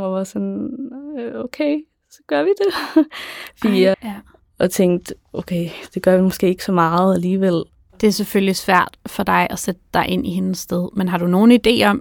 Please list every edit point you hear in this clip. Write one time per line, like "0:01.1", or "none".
0:03.9